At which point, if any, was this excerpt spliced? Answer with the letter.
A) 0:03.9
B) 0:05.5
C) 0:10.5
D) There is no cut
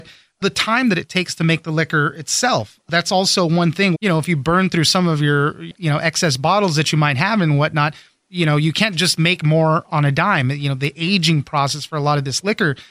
A